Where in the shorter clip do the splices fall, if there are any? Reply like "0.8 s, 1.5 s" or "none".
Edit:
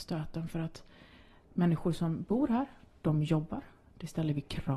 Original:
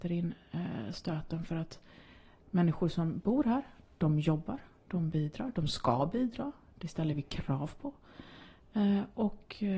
3.8 s